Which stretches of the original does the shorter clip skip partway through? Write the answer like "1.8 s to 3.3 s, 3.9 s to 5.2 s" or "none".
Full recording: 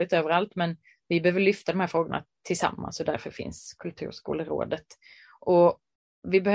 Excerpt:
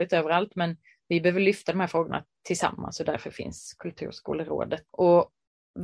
4.9 s to 5.4 s